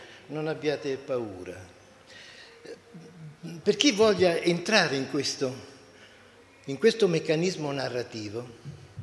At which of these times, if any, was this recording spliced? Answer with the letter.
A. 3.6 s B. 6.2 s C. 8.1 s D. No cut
A